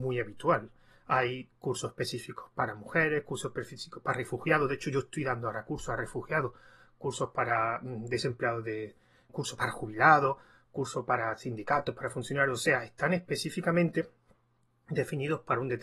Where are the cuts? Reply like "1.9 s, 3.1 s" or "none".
9.3 s